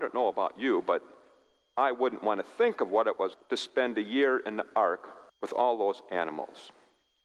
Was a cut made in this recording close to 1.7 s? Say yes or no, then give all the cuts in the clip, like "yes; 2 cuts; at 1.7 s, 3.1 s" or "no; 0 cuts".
no; 2 cuts; at 3.3 s, 5.3 s